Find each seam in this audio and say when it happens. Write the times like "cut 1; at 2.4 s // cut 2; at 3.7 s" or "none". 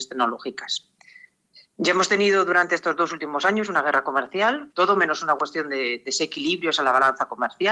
cut 1; at 4.7 s